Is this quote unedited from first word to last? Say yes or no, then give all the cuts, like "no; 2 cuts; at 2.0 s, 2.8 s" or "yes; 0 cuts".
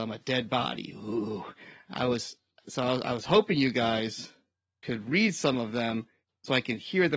yes; 0 cuts